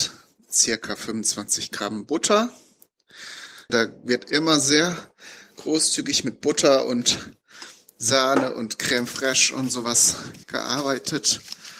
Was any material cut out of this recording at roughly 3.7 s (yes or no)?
yes